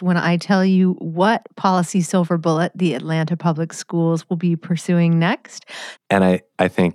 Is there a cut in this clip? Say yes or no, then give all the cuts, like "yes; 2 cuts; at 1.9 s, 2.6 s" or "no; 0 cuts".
yes; 1 cut; at 6.0 s